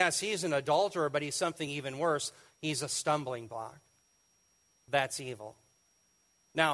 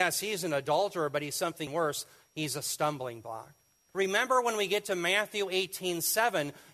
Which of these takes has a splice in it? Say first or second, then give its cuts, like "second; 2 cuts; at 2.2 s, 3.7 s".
second; 2 cuts; at 1.7 s, 3.9 s